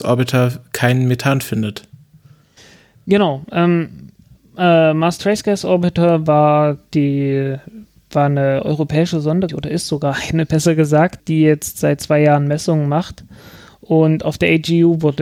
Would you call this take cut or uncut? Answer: cut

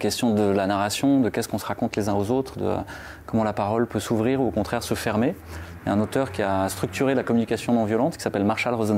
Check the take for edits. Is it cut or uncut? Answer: uncut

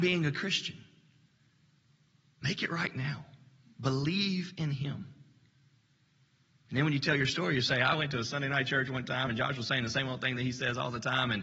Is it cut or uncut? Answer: uncut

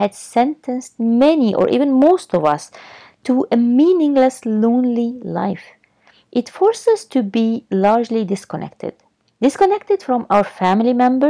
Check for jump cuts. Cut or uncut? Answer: uncut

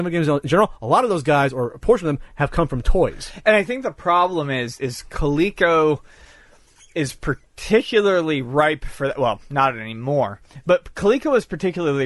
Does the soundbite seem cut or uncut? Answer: cut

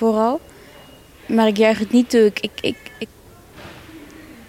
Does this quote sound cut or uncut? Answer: uncut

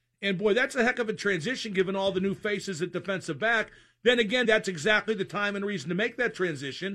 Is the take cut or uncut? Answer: cut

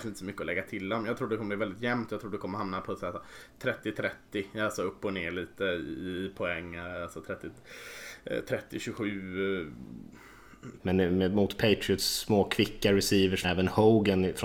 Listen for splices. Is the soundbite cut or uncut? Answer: cut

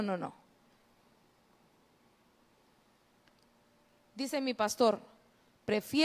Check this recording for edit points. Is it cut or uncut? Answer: uncut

